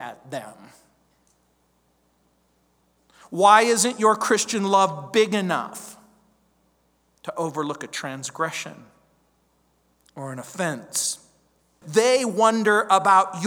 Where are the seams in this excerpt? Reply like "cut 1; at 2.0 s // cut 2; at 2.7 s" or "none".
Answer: cut 1; at 11.8 s